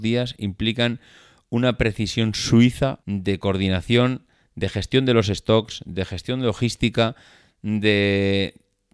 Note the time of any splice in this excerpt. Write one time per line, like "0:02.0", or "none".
0:03.0